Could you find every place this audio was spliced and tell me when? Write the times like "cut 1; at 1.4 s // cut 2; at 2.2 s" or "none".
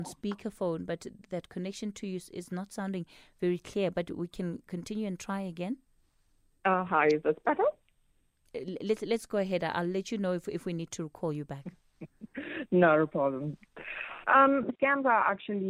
cut 1; at 14.7 s